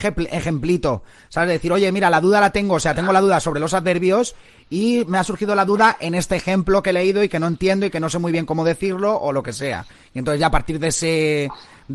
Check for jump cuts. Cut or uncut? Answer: uncut